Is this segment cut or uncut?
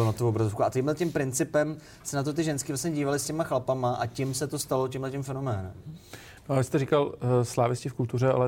uncut